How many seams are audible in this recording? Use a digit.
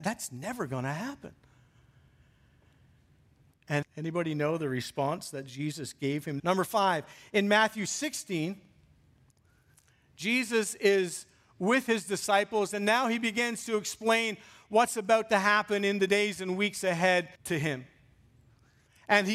3